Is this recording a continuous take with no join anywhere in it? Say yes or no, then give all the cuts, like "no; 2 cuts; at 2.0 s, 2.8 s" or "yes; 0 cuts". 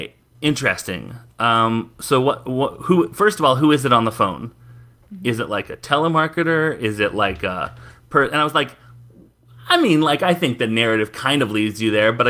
yes; 0 cuts